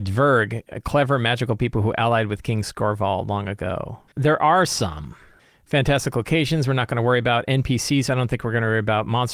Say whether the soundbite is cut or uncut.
cut